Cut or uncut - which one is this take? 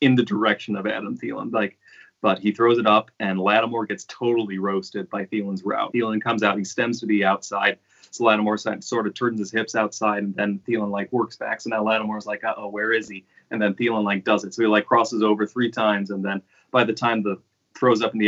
cut